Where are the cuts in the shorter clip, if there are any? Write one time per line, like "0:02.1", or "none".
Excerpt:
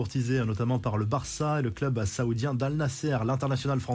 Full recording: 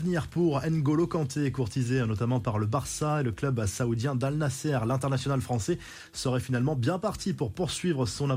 none